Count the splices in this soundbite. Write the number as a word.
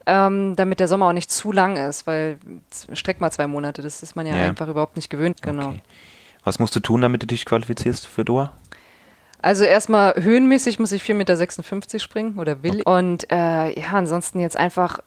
two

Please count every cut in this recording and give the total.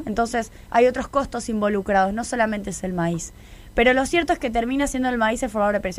zero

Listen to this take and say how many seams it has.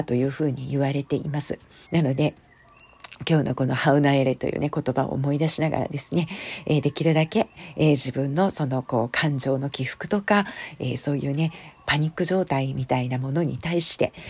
one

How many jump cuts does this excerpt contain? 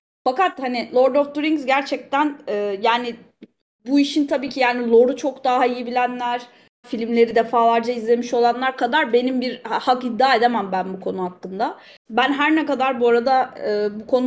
two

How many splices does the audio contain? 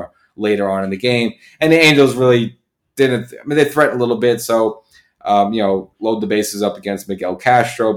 one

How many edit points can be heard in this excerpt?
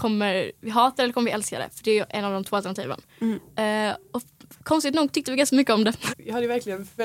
one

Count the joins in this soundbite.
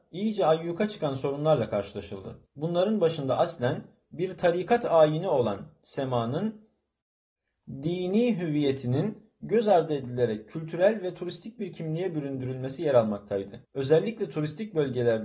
two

